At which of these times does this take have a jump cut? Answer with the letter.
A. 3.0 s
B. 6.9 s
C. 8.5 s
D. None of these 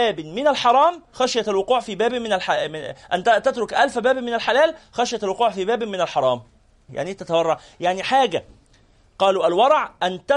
B